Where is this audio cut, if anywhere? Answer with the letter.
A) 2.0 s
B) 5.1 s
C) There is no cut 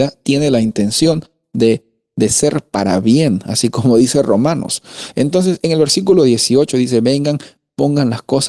C